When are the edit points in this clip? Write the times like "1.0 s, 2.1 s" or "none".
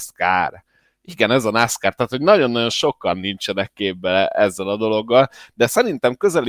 none